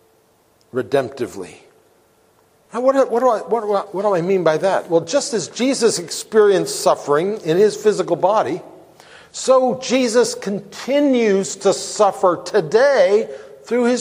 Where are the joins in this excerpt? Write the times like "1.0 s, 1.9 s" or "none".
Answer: 2.7 s